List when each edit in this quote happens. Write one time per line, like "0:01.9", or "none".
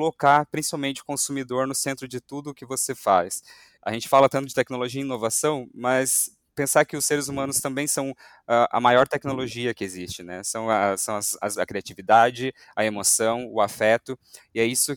0:03.8
0:11.6